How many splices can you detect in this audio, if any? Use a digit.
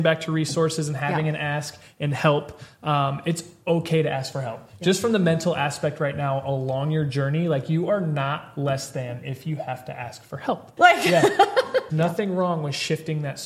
2